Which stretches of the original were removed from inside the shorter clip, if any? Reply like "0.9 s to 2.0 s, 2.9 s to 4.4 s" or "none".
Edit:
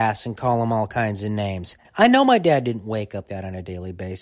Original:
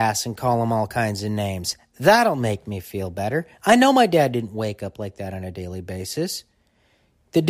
1.8 s to 3.5 s, 4.9 s to 5.1 s